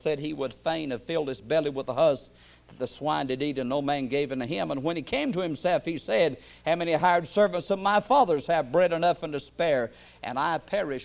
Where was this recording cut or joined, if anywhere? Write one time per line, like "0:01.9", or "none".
none